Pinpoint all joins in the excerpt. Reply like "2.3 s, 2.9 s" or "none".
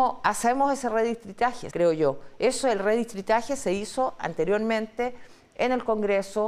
1.7 s